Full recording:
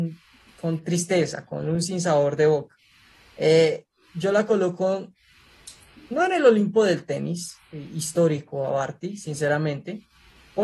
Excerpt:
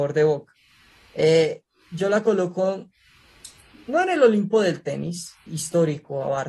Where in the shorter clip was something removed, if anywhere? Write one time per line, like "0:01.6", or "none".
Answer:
0:05.5